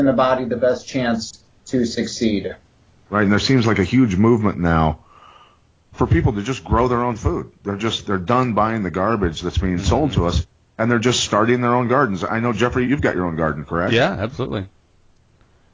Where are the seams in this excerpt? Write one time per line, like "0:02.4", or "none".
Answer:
0:12.8